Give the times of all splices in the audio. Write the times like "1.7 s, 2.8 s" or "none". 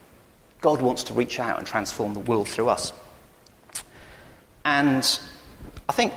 2.2 s